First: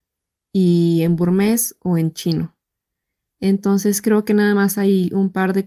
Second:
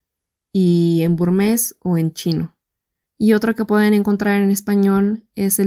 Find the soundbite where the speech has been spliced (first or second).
second